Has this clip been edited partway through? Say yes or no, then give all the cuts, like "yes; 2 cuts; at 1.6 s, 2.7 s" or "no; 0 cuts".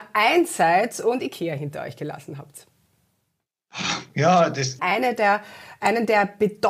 yes; 1 cut; at 4.8 s